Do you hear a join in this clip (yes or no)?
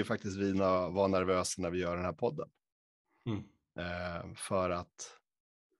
no